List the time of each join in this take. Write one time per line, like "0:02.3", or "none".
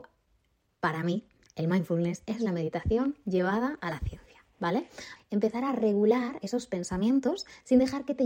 0:05.2